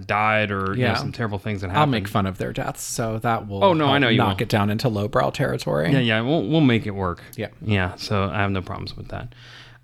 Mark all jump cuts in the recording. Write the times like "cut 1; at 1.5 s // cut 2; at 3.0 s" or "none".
none

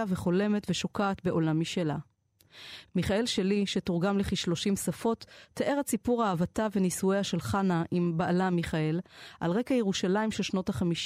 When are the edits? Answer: none

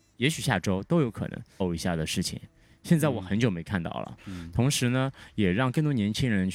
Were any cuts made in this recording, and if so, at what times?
cut 1; at 1.6 s // cut 2; at 4.2 s

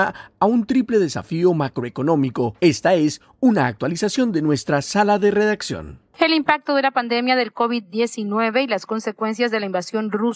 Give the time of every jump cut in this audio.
cut 1; at 2.6 s // cut 2; at 6.1 s

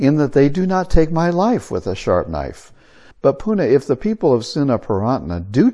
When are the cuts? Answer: cut 1; at 3.1 s

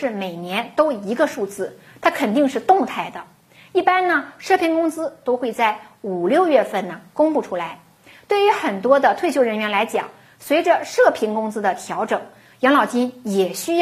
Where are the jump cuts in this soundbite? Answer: none

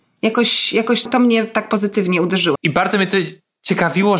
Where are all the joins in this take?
cut 1; at 1.1 s // cut 2; at 2.6 s

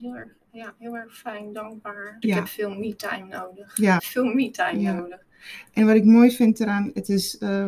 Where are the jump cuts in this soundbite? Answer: cut 1; at 2.2 s // cut 2; at 4.0 s

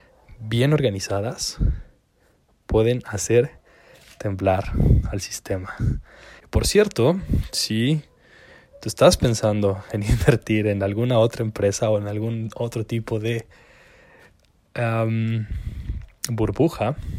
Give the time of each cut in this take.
cut 1; at 6.4 s

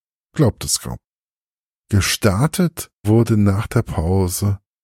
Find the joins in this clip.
cut 1; at 3.0 s

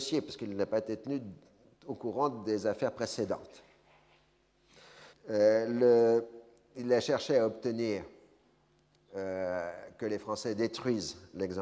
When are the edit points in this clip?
cut 1; at 5.1 s

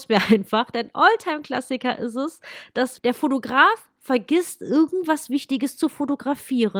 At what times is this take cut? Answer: cut 1; at 3.0 s

